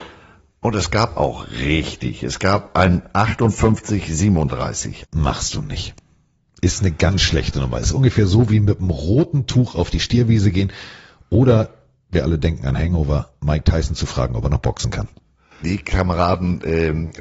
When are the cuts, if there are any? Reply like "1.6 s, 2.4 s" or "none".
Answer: 5.0 s, 15.6 s

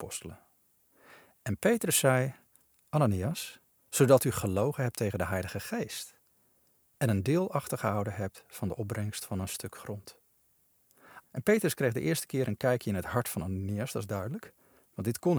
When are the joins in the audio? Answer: 3.8 s, 11.2 s

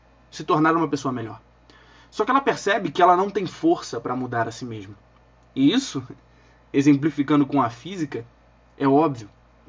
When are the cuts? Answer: none

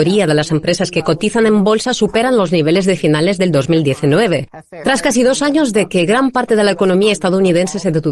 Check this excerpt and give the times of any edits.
4.8 s

